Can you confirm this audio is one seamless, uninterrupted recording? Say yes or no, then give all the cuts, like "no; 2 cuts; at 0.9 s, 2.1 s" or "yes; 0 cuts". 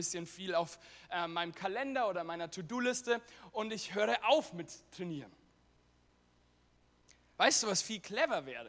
yes; 0 cuts